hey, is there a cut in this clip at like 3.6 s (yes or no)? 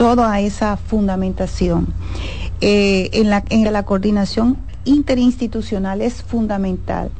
yes